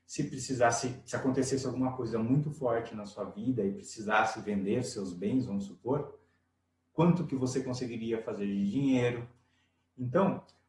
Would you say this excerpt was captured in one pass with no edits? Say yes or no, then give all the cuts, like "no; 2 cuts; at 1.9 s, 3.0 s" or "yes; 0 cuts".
yes; 0 cuts